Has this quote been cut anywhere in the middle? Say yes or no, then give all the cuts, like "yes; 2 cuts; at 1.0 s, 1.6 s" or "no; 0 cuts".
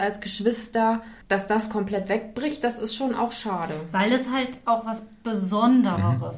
no; 0 cuts